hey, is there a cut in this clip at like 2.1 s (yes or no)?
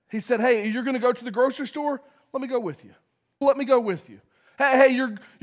no